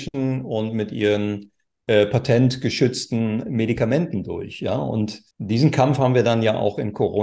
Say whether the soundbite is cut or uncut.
cut